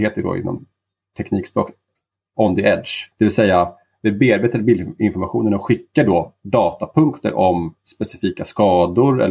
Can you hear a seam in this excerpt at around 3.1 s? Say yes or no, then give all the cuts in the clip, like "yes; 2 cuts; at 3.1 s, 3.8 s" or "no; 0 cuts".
yes; 1 cut; at 3.1 s